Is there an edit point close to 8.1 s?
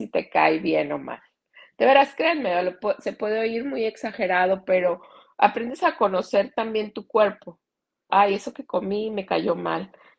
yes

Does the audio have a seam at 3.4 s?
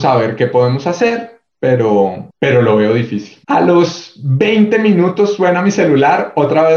yes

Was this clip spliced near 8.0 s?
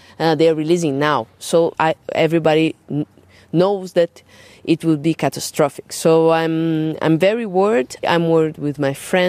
yes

